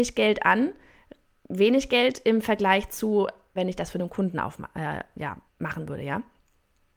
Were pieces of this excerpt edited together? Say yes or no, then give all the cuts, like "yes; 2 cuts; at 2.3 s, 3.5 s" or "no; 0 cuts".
yes; 2 cuts; at 3.6 s, 5.5 s